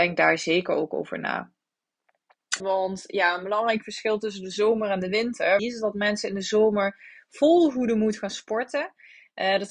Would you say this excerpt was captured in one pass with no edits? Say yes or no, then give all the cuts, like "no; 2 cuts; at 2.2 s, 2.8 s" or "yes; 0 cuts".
no; 2 cuts; at 2.6 s, 5.6 s